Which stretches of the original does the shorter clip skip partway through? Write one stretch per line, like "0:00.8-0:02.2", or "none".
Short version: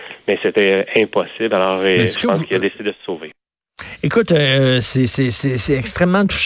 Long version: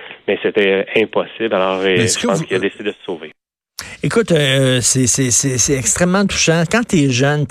none